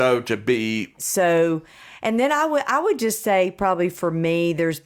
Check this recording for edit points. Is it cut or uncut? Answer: cut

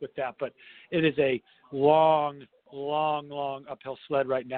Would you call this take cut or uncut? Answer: uncut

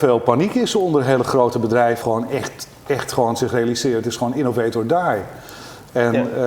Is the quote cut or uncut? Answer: cut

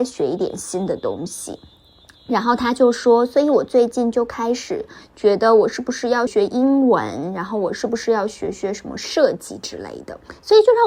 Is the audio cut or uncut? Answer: cut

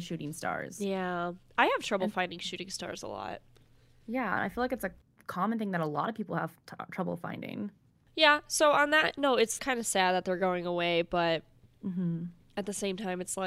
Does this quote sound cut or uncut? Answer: cut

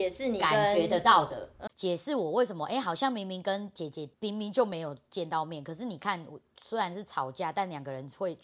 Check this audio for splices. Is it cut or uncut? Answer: cut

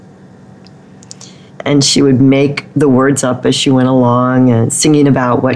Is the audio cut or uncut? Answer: cut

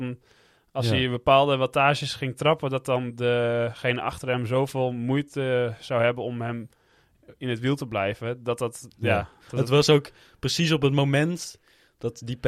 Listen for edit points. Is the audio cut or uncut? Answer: uncut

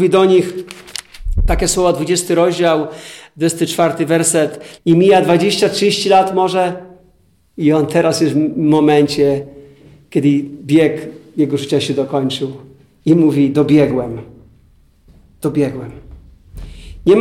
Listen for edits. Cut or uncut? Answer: cut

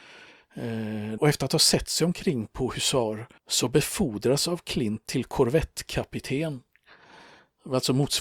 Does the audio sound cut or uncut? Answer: cut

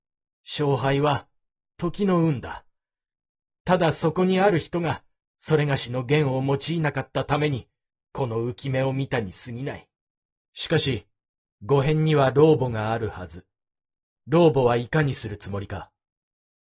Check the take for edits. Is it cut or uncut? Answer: cut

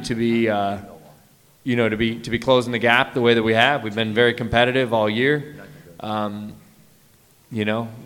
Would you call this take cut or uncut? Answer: uncut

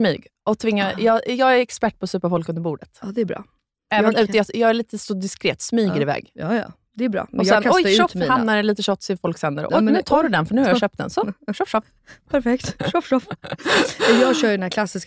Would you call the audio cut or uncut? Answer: uncut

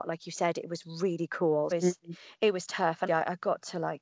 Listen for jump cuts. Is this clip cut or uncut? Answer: cut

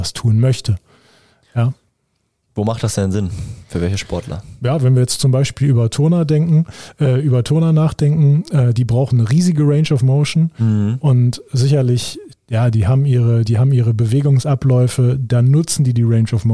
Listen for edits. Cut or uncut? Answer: uncut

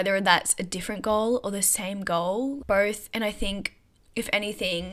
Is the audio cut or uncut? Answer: cut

